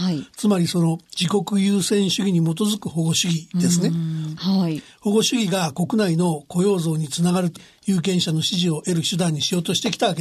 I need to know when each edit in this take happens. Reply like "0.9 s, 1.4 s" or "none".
4.4 s, 7.6 s